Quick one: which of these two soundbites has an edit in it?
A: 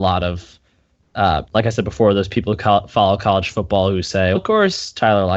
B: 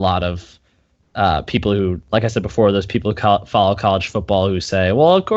A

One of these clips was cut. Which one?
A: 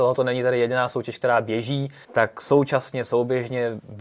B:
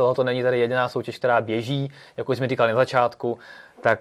A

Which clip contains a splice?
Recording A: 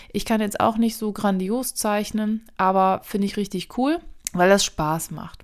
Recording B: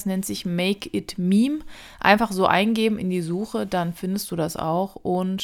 A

